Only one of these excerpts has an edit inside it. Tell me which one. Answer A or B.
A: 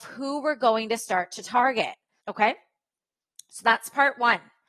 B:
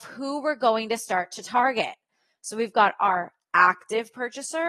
A